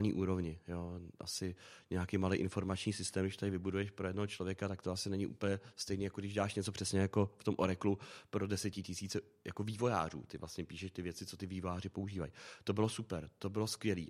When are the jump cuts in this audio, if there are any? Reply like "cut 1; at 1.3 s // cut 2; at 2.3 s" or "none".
none

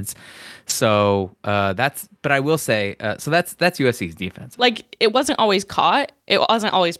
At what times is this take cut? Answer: cut 1; at 4.6 s

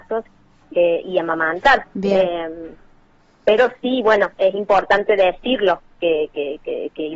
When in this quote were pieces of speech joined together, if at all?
cut 1; at 1.8 s

